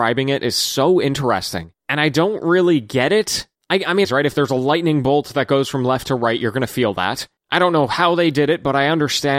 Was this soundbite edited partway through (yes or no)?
yes